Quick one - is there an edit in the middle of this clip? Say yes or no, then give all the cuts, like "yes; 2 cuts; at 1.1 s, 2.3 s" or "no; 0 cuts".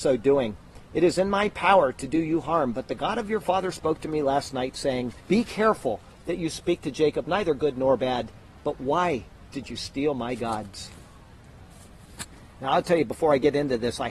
yes; 2 cuts; at 5.2 s, 8.6 s